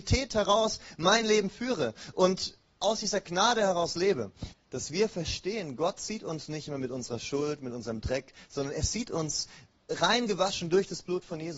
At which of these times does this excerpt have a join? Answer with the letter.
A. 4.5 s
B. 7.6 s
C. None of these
A